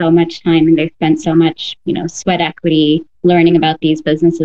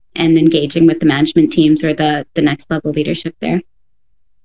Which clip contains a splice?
first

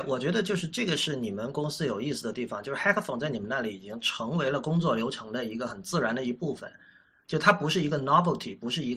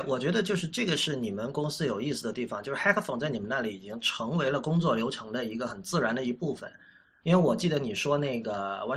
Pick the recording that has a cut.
second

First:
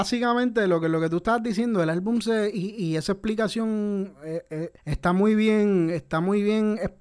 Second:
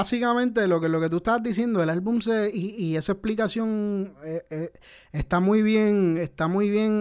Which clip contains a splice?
first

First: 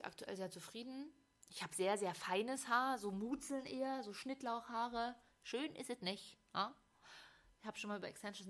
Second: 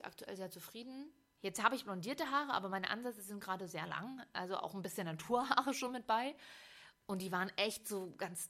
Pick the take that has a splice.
second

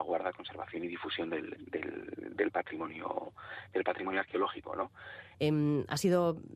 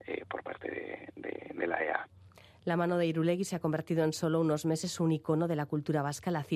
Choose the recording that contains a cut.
first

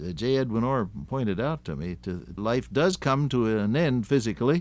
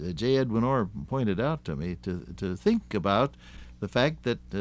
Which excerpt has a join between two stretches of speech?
first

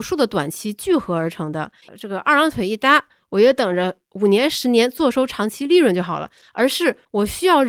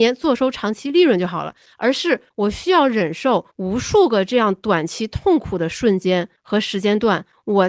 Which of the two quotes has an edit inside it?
first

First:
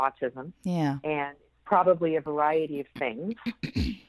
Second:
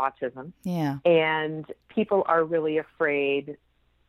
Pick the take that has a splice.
second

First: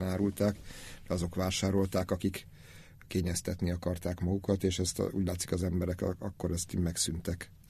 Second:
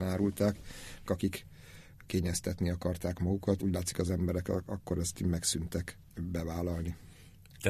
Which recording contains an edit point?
second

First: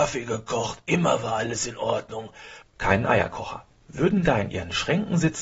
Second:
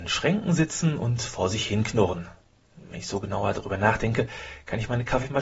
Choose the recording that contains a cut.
first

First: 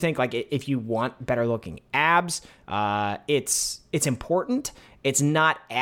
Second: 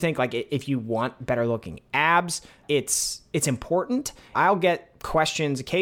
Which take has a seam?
second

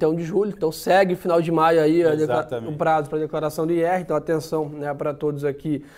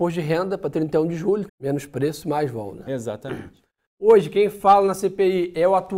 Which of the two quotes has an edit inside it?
second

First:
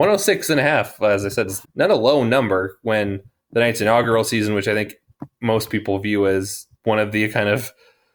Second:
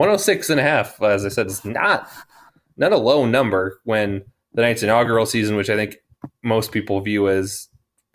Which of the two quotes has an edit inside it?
first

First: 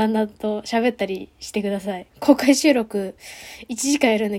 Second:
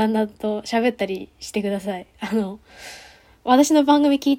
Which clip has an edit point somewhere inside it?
first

